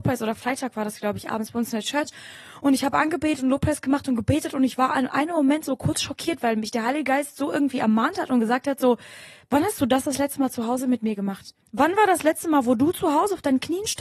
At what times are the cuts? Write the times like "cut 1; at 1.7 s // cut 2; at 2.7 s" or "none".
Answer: cut 1; at 11.6 s